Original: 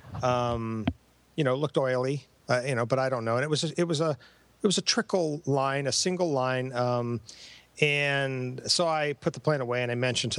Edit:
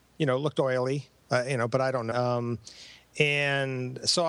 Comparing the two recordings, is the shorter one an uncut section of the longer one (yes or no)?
no